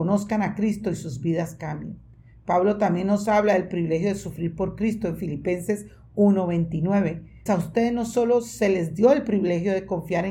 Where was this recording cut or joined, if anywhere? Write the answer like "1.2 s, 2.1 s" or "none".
7.5 s